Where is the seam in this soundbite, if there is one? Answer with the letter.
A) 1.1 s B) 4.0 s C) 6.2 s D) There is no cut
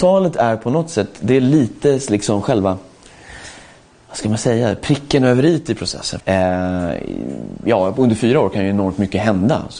C